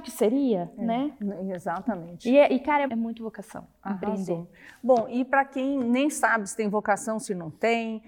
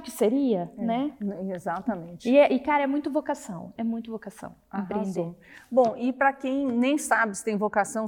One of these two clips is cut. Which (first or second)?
first